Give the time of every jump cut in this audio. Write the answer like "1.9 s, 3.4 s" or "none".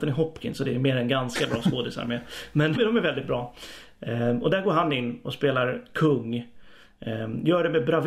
2.7 s